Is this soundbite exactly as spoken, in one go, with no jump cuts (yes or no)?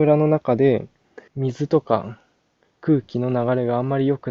no